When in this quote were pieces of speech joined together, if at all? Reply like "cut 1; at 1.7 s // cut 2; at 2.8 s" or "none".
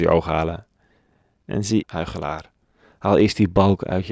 cut 1; at 1.8 s